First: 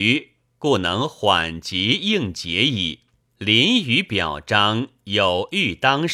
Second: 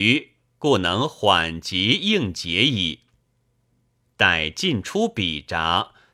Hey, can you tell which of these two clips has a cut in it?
first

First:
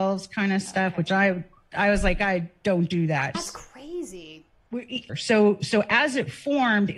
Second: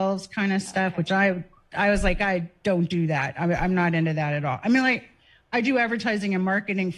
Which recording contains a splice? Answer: first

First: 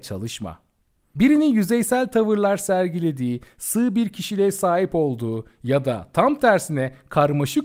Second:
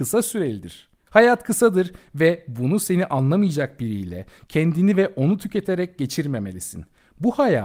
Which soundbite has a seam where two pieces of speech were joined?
second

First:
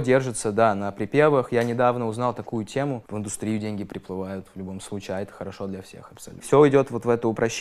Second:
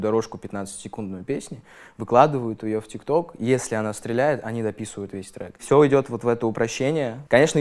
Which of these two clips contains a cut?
first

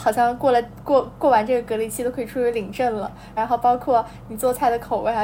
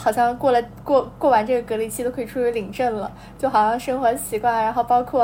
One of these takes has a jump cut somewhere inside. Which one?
first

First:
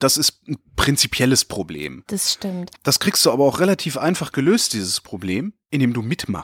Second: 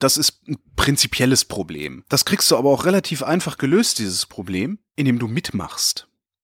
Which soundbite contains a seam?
second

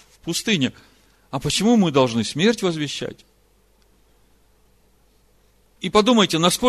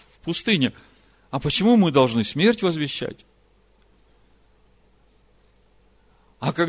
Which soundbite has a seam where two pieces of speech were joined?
first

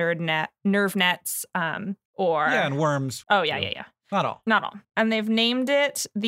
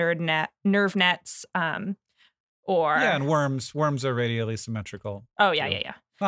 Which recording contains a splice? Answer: first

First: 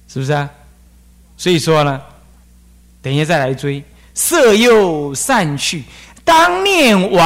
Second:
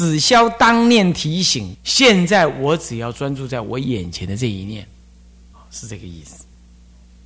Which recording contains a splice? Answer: second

